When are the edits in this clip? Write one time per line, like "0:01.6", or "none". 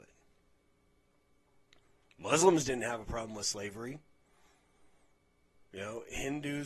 none

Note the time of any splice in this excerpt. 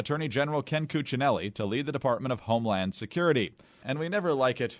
0:03.8

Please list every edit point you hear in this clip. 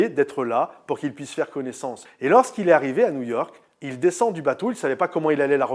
0:02.1

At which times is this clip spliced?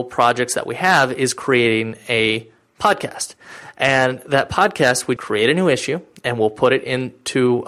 0:05.2

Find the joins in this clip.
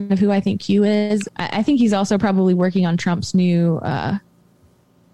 0:01.3

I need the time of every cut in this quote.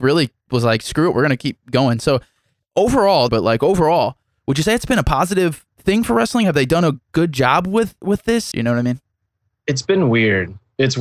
0:03.3
0:08.5

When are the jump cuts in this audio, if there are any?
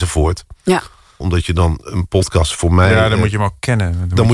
0:01.2

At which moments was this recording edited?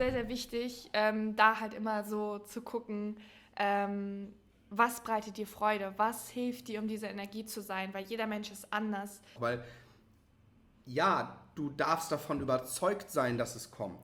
0:09.4

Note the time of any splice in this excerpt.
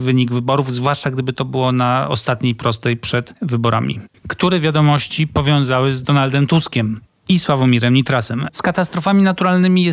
0:04.1
0:08.5

